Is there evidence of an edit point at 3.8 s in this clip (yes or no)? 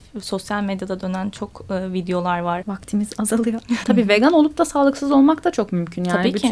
yes